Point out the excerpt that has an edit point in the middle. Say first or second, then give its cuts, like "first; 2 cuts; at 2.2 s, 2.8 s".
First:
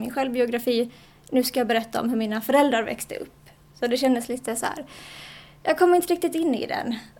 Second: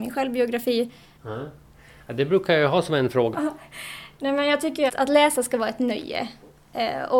second; 3 cuts; at 1.2 s, 3.3 s, 4.9 s